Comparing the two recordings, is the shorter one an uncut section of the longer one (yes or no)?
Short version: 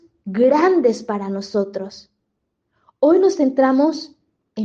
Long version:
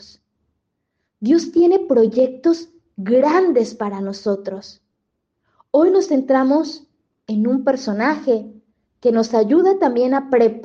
yes